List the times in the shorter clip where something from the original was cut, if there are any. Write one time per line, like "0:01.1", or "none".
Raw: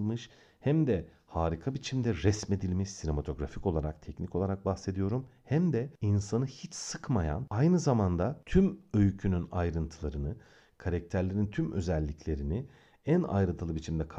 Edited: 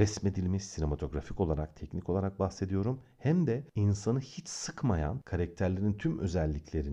0:05.2